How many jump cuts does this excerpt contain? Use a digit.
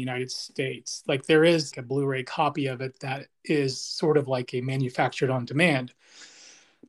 1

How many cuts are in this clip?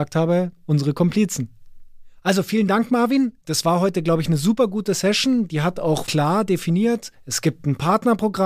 1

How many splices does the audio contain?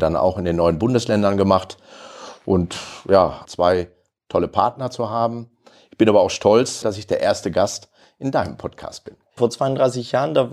3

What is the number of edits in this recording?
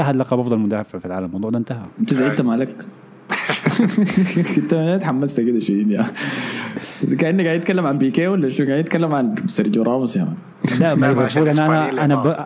1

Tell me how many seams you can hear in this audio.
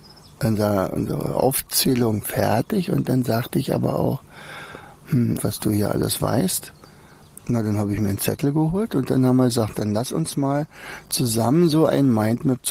3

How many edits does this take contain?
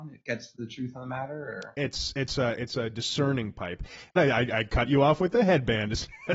1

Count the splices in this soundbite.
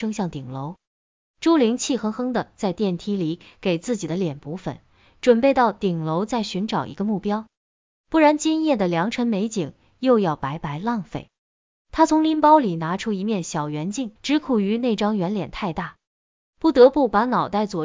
1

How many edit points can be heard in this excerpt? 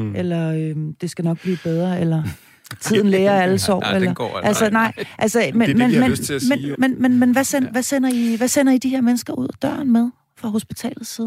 1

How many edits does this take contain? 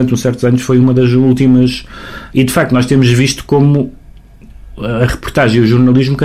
1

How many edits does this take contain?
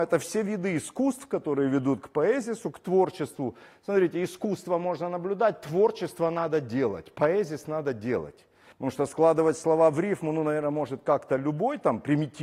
1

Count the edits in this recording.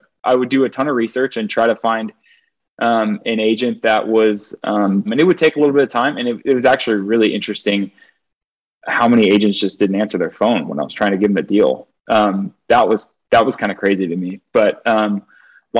1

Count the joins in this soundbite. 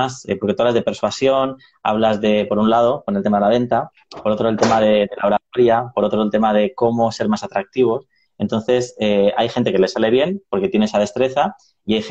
1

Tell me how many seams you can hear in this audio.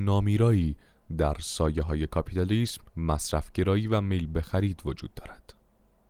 1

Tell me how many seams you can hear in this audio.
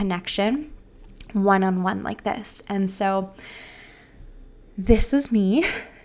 0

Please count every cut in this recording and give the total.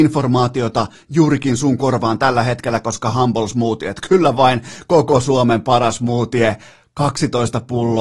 0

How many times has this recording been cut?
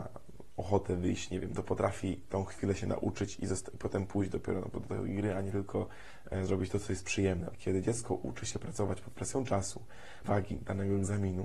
3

